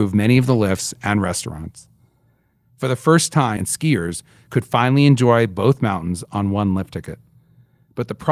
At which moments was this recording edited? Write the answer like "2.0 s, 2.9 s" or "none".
3.6 s